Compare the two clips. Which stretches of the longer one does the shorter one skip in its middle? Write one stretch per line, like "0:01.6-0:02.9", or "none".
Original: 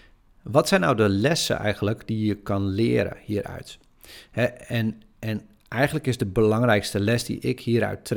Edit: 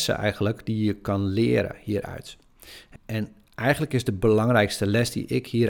0:04.4-0:05.1